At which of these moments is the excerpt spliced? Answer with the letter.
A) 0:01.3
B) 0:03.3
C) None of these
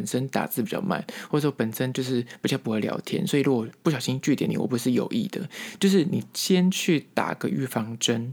C